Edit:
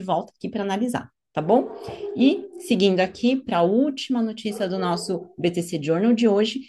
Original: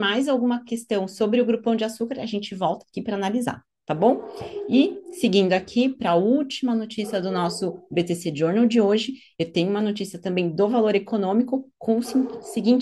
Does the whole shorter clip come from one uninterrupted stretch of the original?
yes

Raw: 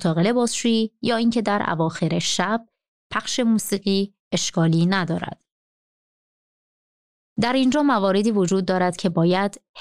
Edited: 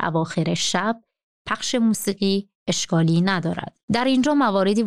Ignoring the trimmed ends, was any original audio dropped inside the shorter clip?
yes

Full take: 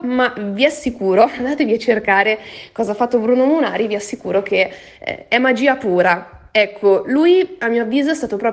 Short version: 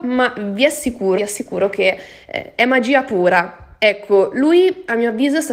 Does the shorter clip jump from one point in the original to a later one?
yes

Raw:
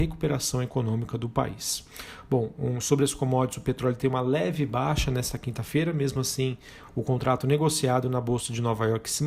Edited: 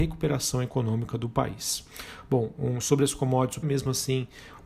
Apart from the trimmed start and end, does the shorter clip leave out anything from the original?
yes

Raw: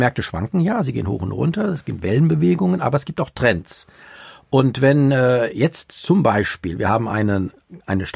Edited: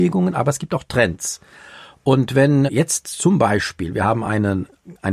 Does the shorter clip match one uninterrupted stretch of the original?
no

